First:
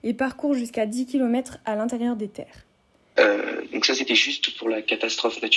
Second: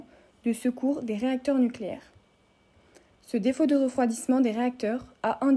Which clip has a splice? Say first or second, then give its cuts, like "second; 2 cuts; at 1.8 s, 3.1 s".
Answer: first; 1 cut; at 3.2 s